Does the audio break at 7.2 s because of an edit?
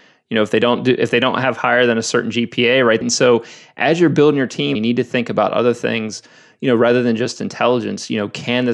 no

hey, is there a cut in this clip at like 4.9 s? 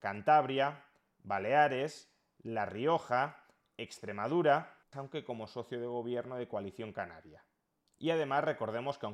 yes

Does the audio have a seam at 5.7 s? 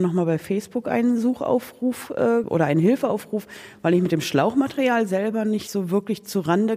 no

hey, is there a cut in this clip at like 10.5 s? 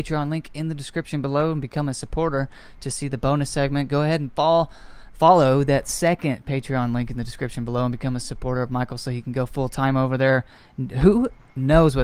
no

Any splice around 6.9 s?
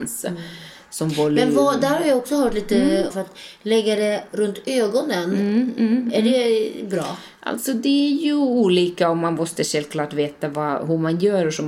no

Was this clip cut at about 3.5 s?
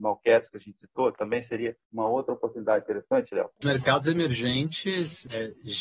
yes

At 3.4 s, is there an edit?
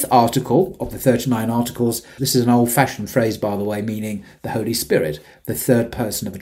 no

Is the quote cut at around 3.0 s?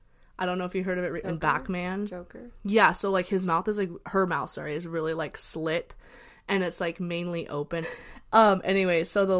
no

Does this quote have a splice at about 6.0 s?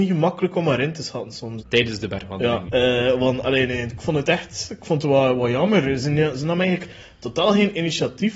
no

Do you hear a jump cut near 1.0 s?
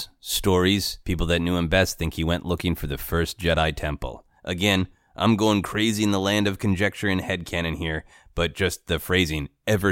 yes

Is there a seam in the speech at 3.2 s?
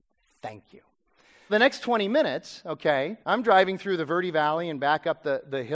yes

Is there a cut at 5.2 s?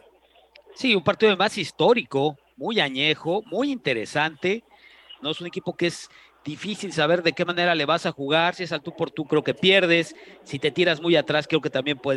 yes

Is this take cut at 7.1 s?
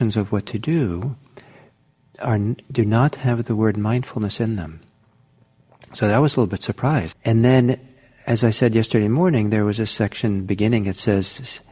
yes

